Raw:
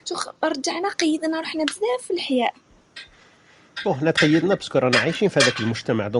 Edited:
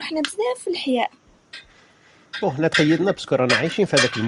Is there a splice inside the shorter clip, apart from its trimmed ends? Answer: no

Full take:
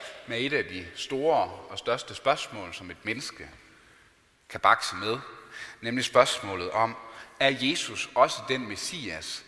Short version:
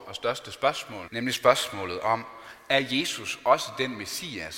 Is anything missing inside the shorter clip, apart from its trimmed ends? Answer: yes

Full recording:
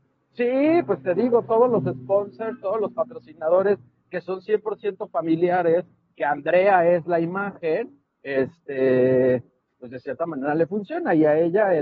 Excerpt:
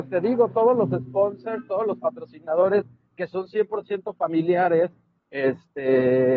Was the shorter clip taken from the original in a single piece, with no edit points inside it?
no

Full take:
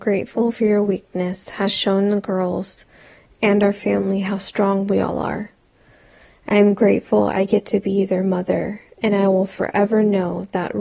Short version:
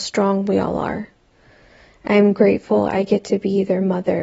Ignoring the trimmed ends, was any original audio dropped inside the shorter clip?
no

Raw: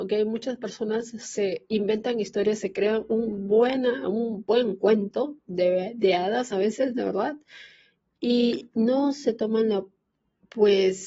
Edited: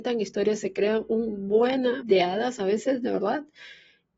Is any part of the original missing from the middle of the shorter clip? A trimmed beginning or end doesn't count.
yes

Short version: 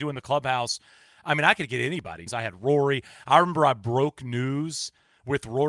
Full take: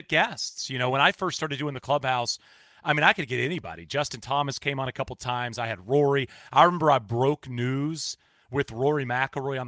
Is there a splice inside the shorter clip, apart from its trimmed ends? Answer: yes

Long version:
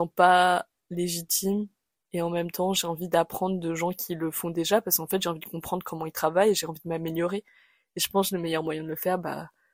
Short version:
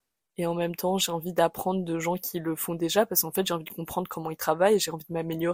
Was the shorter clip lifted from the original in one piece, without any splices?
yes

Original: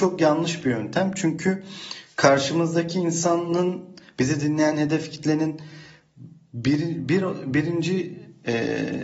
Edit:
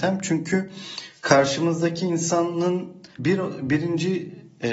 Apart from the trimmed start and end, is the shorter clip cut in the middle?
yes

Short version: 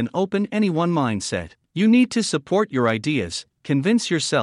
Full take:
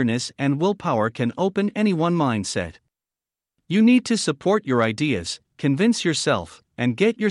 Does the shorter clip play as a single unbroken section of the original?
no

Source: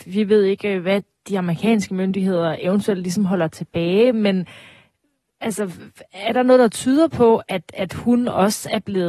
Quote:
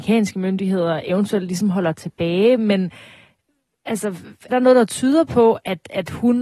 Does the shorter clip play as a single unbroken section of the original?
no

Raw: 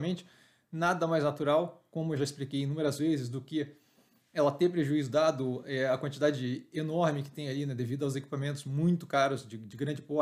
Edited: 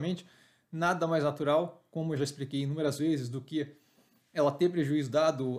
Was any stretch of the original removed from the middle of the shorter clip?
no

